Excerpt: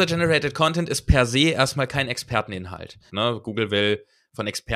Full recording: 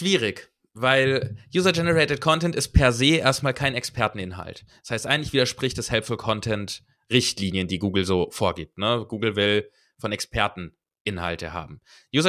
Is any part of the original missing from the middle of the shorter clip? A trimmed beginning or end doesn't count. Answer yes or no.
yes